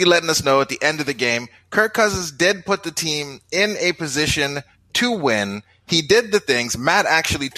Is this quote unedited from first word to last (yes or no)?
yes